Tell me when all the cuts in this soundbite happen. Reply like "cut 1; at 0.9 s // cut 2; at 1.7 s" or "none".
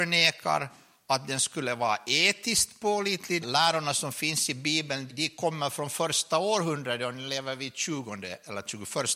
cut 1; at 3.4 s // cut 2; at 5.1 s